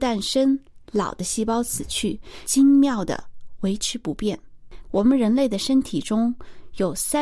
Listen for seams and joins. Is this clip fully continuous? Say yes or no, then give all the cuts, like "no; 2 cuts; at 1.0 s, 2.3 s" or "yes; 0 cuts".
no; 2 cuts; at 2.4 s, 4.8 s